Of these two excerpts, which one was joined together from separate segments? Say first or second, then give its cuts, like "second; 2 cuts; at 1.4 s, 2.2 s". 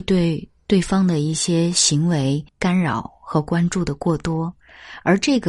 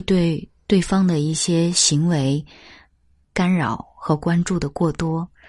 first; 1 cut; at 2.5 s